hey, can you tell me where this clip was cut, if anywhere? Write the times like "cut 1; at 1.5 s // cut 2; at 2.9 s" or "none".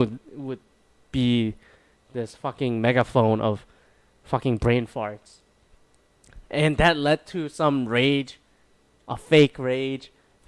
none